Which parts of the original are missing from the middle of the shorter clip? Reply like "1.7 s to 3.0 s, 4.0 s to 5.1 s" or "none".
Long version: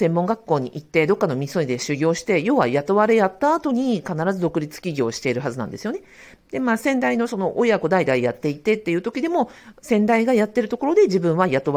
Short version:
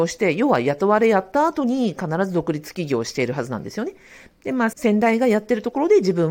6.8 s to 9.8 s